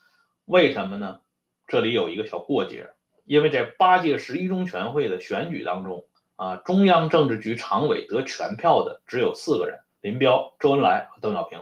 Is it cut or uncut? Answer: cut